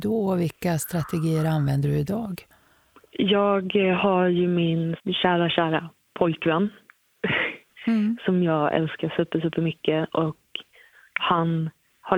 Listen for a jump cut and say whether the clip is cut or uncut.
uncut